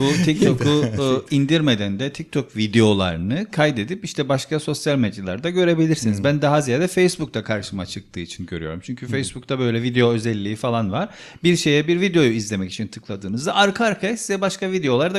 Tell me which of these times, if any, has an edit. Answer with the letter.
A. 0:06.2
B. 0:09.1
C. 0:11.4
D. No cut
D